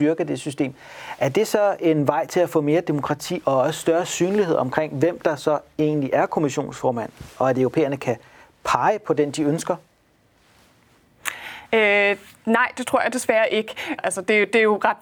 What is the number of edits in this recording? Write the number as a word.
two